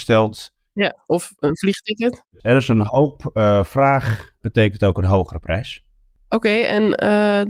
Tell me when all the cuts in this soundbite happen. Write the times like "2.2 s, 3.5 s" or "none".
4.4 s

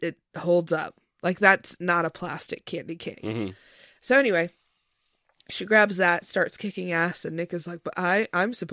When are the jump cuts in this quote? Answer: 3.1 s

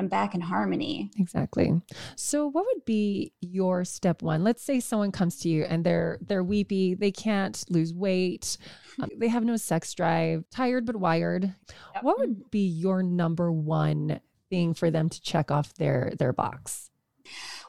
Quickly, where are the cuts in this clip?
9.1 s, 10.5 s

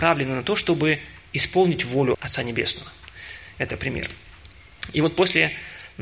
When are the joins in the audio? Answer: 2.1 s

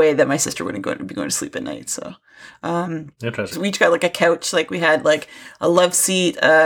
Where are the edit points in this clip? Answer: 3.5 s

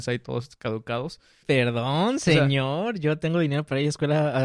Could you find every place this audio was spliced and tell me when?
1.4 s

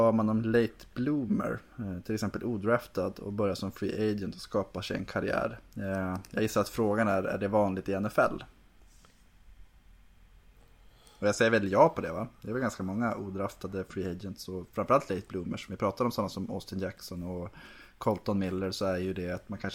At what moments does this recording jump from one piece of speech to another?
none

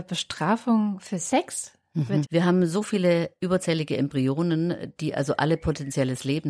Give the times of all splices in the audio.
2.2 s

